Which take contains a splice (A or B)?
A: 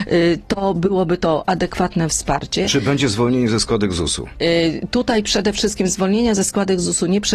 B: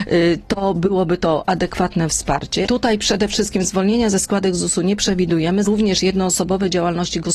B